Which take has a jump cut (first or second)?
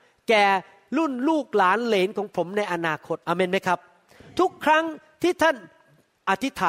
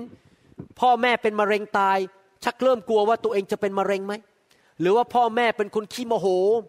first